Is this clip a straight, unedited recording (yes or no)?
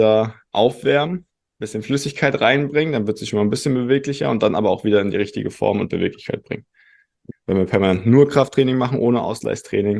no